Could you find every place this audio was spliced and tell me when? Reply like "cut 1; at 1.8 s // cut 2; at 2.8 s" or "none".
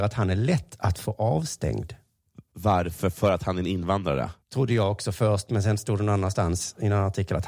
cut 1; at 4.4 s